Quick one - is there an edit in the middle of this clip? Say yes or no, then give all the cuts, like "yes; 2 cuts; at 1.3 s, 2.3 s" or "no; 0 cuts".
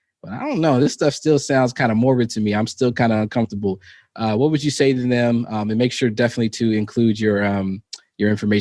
no; 0 cuts